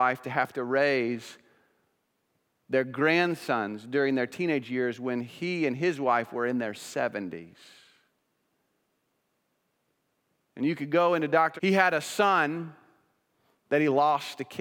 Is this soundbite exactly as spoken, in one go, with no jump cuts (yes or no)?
no